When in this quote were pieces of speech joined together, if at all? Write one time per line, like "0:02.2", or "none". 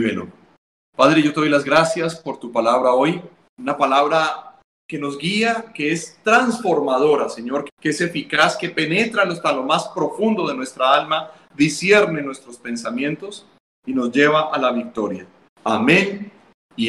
0:07.7
0:15.5